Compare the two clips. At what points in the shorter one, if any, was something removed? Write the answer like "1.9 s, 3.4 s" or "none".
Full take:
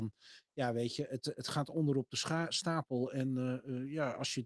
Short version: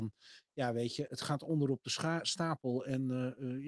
1.1 s